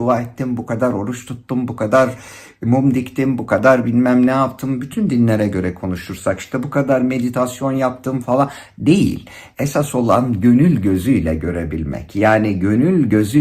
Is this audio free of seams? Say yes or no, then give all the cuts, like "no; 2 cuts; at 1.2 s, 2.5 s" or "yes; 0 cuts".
no; 1 cut; at 8.2 s